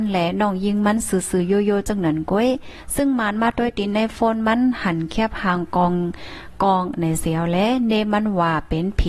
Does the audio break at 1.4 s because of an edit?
no; 0 cuts

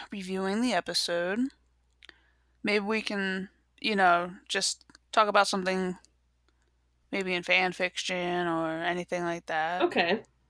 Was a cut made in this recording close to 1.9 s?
no; 0 cuts

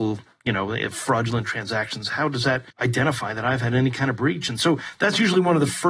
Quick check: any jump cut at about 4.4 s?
no; 1 cut; at 2.7 s

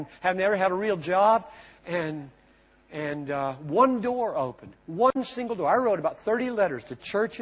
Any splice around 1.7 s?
no; 0 cuts

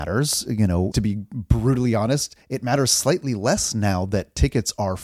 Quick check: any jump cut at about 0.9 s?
yes; 1 cut; at 0.9 s

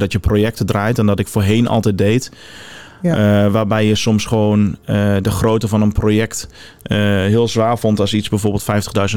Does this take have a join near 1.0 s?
no; 0 cuts

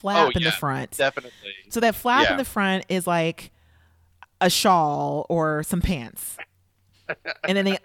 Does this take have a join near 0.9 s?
no; 0 cuts

